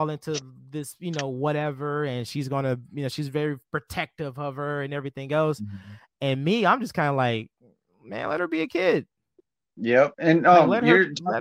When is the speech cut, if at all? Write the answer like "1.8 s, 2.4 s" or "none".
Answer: none